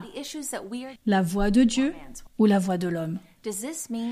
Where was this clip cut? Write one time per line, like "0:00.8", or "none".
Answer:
0:01.0
0:02.3

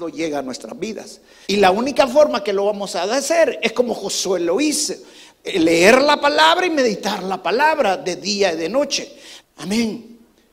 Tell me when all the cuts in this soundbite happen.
0:01.4
0:09.4

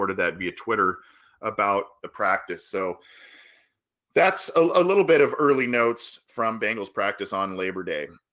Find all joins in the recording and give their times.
none

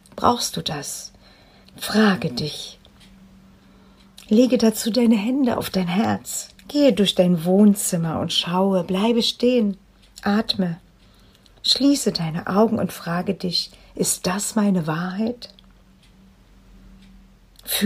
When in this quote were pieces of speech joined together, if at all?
0:01.6
0:06.6

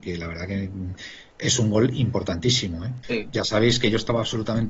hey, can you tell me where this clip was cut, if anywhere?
0:03.0

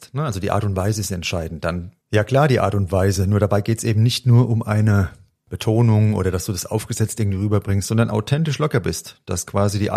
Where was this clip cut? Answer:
none

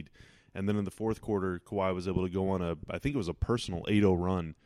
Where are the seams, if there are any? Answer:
none

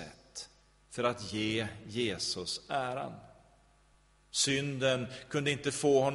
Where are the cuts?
none

